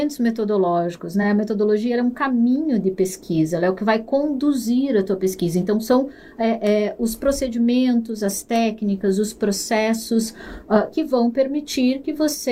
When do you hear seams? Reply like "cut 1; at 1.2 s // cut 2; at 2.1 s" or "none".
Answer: none